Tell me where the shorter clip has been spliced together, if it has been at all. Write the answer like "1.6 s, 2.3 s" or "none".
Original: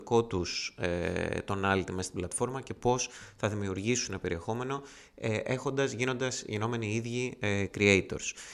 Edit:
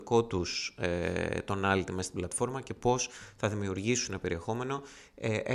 none